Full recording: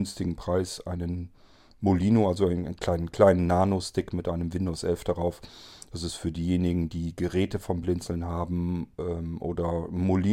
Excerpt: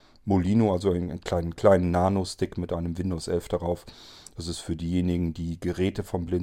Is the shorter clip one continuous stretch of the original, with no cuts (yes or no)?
yes